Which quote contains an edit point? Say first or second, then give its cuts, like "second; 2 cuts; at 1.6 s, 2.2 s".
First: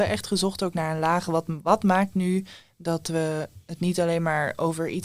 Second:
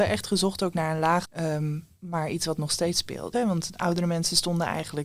second; 2 cuts; at 1.2 s, 3.3 s